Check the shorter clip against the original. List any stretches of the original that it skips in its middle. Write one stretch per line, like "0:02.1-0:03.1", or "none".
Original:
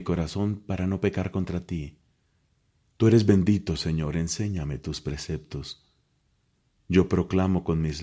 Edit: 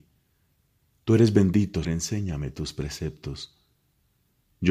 0:03.8-0:04.1